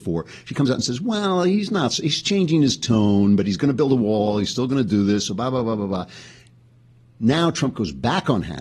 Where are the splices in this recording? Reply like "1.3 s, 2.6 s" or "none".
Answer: none